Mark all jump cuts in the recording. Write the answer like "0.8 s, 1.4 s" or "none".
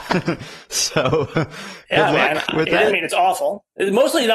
2.9 s